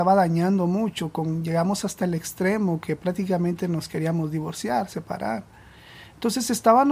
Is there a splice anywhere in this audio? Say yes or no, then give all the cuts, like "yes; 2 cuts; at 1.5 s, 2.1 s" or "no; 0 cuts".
no; 0 cuts